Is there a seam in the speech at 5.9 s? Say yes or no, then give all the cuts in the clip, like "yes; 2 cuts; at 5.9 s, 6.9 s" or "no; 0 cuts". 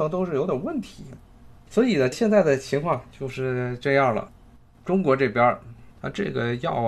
yes; 1 cut; at 5.9 s